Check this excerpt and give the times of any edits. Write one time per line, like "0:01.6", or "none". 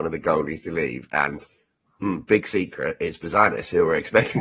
none